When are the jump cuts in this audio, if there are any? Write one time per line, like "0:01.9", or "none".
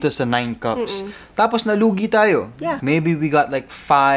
0:02.8